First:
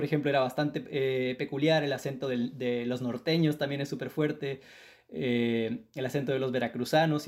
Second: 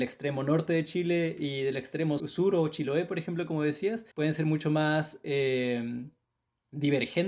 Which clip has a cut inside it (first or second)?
second